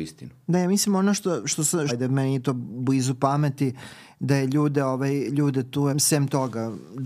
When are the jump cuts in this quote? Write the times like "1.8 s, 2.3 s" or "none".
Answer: 1.9 s, 5.9 s